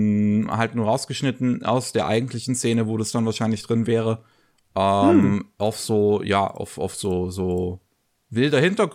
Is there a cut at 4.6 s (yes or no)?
no